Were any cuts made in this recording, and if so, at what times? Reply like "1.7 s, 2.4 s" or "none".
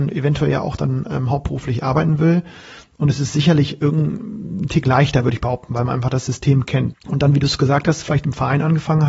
6.9 s